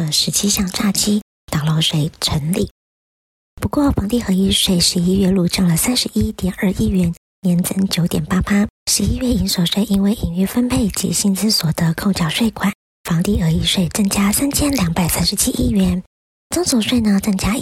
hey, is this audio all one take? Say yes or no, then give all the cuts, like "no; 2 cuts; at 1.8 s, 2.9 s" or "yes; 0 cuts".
no; 2 cuts; at 3.4 s, 8.8 s